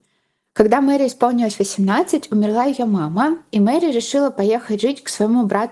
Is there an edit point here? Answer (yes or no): no